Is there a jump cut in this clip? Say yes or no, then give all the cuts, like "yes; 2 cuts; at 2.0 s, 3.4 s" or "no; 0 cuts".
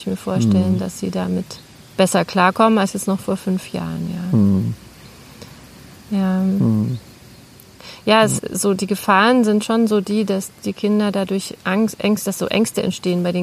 no; 0 cuts